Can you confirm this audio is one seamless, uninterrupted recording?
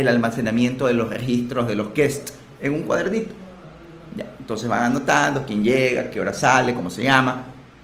yes; 0 cuts

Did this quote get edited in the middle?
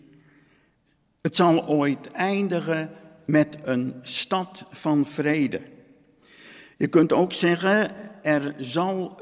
no; 0 cuts

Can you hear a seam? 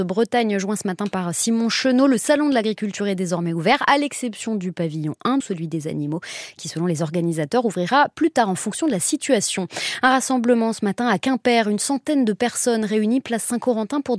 yes; 1 cut; at 5.4 s

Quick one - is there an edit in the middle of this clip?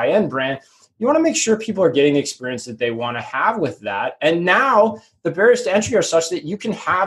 no; 0 cuts

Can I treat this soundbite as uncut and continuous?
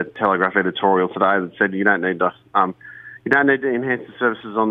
yes; 0 cuts

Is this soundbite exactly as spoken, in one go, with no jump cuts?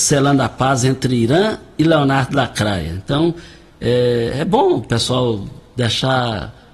yes; 0 cuts

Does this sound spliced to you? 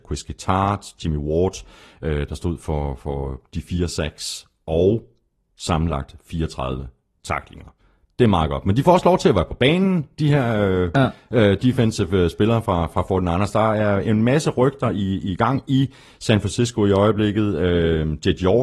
no; 0 cuts

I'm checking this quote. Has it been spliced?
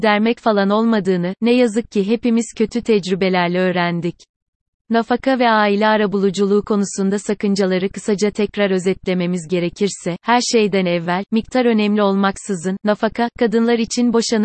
no; 0 cuts

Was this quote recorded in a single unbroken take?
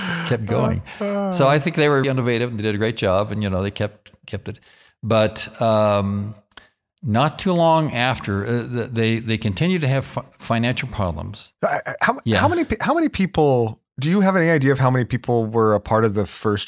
no; 1 cut; at 2.0 s

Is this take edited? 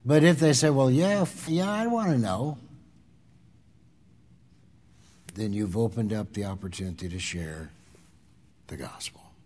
yes; 1 cut; at 1.5 s

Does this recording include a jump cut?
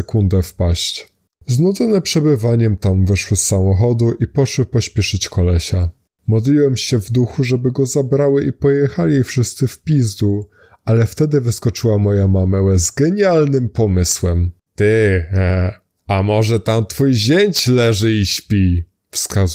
yes; 1 cut; at 14.7 s

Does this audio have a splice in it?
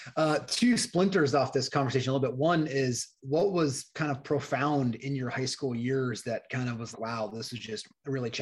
yes; 2 cuts; at 3.2 s, 6.9 s

